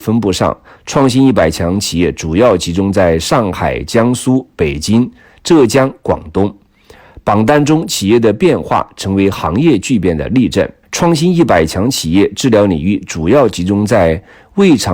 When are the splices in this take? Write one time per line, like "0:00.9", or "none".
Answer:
0:10.8